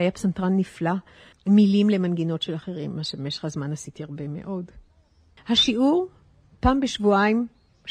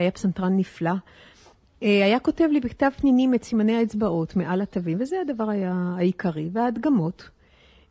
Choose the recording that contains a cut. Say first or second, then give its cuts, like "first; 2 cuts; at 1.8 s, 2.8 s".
first; 2 cuts; at 1.3 s, 5.4 s